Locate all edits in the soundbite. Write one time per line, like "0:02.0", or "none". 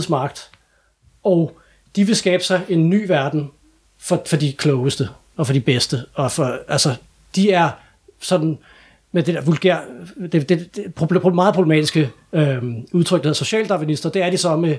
0:04.2